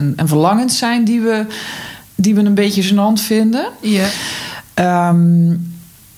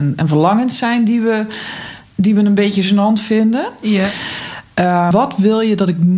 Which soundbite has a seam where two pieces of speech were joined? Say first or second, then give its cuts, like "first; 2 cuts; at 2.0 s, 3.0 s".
second; 1 cut; at 5.1 s